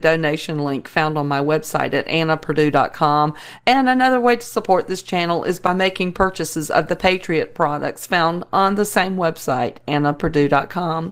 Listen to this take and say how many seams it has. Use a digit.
0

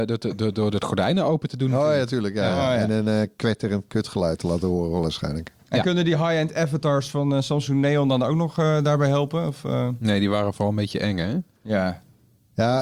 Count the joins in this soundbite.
0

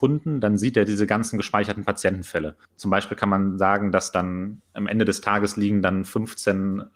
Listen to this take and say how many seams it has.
1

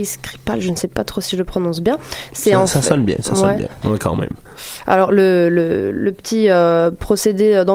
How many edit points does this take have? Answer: 1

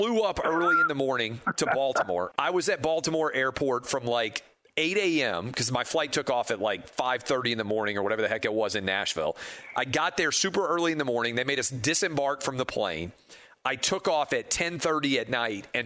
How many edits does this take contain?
2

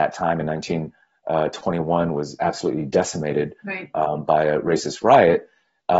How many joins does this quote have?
0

